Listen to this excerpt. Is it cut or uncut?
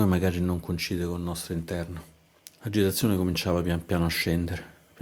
cut